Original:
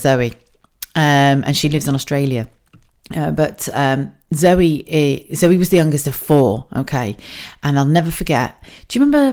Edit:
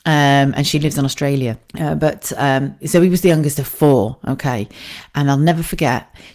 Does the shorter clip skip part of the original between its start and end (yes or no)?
yes